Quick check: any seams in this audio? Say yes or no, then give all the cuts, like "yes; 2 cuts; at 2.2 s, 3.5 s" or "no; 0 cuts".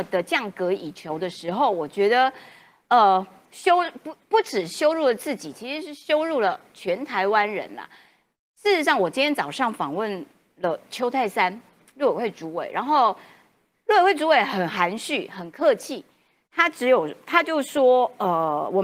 no; 0 cuts